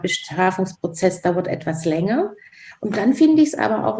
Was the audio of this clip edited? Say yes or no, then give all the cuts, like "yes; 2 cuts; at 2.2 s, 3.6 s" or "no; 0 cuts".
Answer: no; 0 cuts